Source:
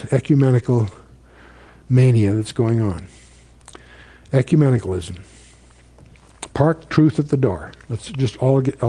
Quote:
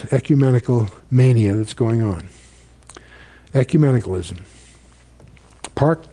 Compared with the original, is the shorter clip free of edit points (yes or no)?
no